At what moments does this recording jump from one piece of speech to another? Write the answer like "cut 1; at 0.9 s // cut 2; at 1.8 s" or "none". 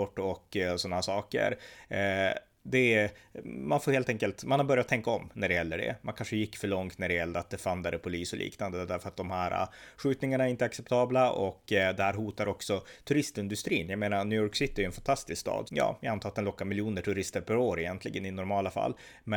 cut 1; at 15.7 s